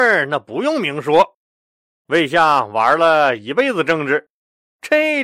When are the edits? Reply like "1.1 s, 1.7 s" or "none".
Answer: none

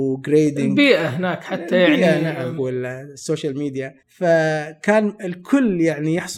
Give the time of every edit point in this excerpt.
2.6 s, 4.0 s

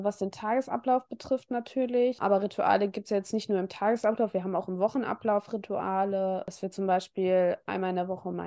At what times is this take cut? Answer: none

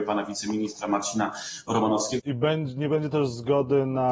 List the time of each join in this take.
2.2 s

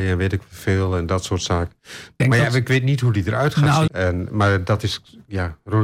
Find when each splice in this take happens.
2.2 s, 3.9 s

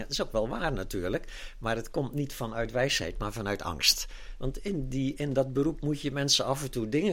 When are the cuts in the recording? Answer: 4.4 s

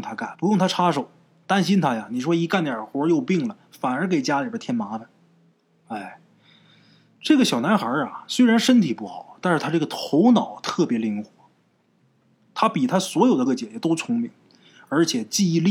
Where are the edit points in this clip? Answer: 13.5 s

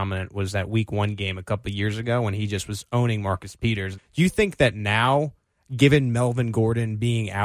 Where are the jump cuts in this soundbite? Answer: 4.0 s

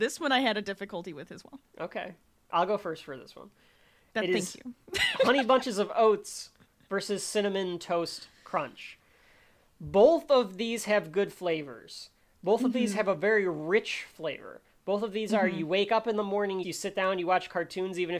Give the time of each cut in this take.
16.6 s

